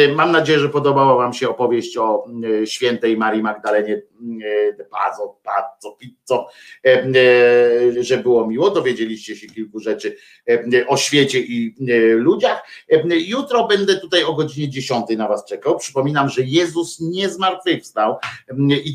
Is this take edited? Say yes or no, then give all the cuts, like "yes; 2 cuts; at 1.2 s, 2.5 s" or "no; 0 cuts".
yes; 1 cut; at 7.9 s